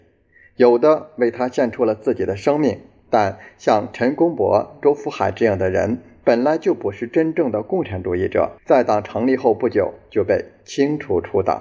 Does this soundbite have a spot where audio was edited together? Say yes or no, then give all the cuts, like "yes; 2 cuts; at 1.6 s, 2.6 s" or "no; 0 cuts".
yes; 1 cut; at 8.6 s